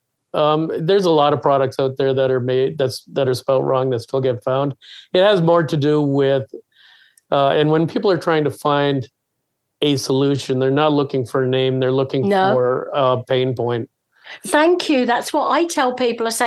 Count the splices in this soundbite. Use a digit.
0